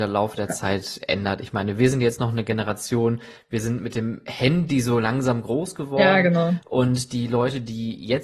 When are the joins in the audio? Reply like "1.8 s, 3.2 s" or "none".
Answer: none